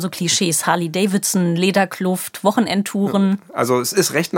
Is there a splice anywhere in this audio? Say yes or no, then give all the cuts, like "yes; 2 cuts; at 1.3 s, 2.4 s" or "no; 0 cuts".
no; 0 cuts